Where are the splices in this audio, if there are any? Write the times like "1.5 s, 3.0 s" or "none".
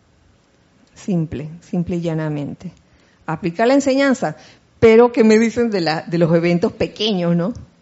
none